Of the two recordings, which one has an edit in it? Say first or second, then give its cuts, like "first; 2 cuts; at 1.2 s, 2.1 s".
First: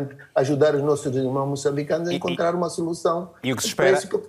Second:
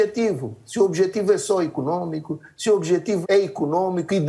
second; 1 cut; at 3.2 s